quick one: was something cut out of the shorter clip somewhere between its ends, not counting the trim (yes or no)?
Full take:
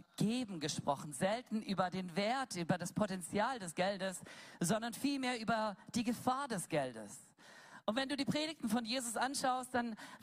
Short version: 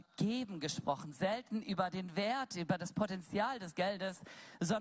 no